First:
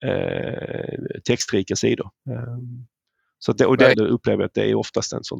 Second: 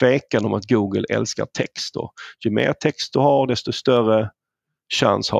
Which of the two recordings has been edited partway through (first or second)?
first